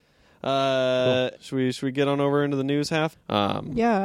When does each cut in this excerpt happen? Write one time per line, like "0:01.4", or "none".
0:01.3
0:03.1